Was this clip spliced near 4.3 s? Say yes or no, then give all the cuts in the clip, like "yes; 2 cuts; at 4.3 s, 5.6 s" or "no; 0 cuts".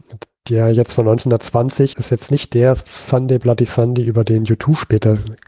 no; 1 cut; at 1.9 s